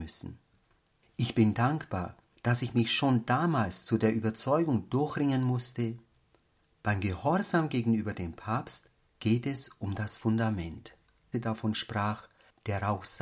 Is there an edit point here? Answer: yes; 1 cut; at 11.3 s

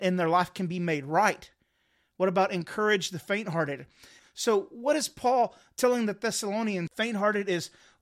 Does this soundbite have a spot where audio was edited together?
yes; 2 cuts; at 4.2 s, 6.9 s

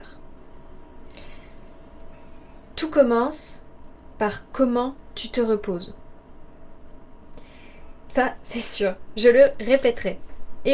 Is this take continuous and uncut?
no; 1 cut; at 8.1 s

